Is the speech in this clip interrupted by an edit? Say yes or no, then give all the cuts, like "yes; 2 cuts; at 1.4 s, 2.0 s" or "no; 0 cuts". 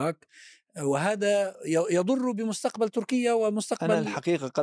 no; 0 cuts